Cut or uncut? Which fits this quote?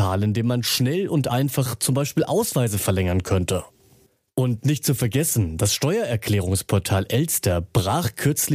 uncut